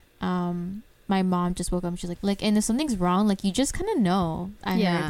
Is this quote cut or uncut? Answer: cut